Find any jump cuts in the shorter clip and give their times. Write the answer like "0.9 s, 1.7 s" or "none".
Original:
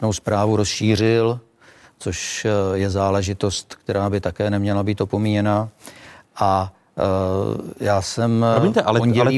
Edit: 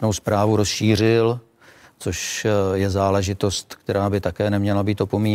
none